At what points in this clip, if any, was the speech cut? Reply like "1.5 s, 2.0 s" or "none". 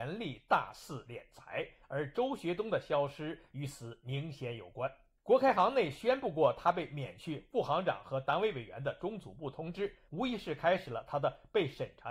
5.2 s, 10.1 s